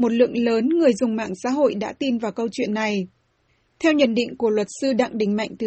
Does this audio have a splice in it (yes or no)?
no